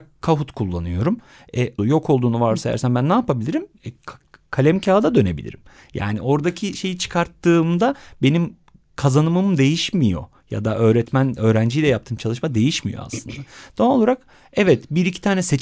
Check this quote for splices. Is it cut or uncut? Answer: cut